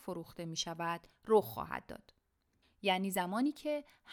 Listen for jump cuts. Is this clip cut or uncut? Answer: cut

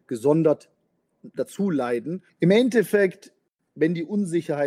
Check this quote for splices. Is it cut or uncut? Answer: cut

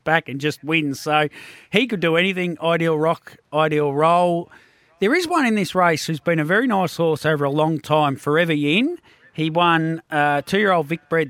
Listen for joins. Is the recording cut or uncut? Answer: uncut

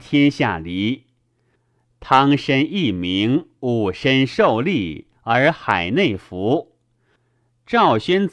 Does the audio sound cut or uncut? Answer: uncut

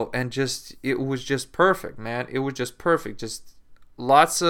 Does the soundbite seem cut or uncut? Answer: uncut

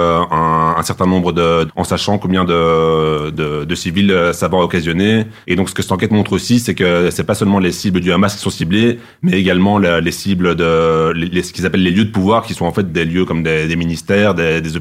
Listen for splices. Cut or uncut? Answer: cut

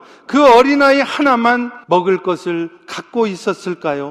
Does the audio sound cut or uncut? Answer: cut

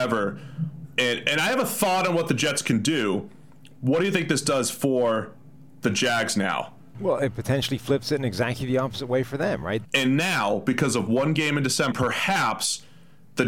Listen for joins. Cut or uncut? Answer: cut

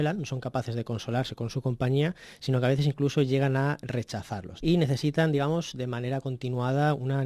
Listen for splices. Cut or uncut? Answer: cut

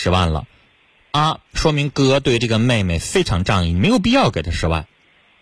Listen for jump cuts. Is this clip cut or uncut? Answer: cut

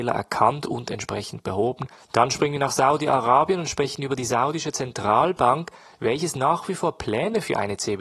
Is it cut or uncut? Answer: cut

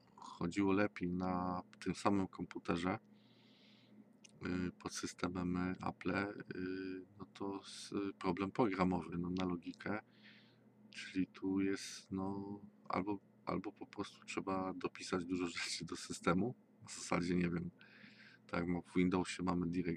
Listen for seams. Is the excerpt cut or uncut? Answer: uncut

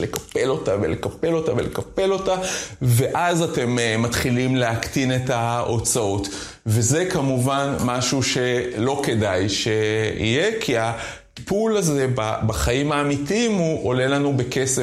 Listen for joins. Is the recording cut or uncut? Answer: uncut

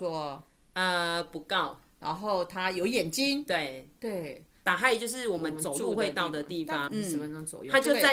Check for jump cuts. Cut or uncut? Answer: cut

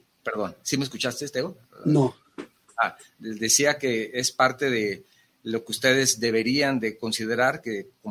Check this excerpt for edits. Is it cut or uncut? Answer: uncut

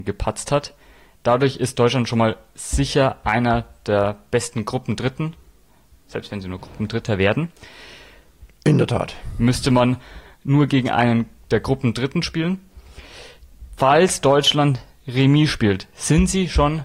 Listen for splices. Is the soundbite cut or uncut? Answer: cut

